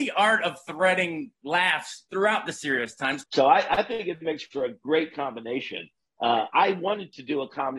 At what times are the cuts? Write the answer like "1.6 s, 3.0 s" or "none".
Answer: 3.2 s